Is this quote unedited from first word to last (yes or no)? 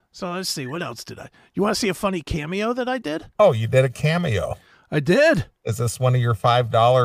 no